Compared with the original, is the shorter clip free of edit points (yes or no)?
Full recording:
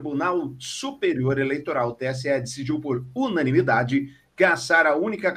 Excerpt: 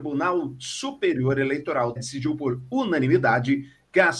no